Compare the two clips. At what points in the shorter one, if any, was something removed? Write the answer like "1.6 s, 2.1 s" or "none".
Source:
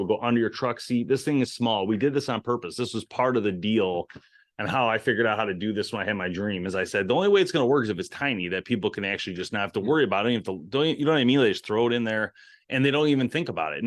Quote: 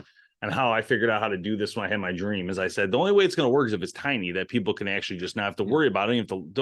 none